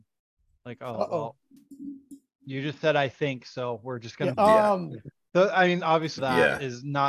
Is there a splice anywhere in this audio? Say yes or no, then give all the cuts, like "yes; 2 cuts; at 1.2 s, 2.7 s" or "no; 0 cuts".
yes; 2 cuts; at 4.3 s, 6.2 s